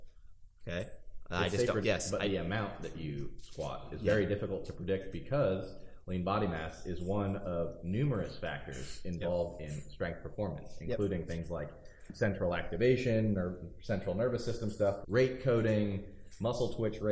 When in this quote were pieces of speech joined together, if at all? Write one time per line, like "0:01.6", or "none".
0:01.8
0:15.0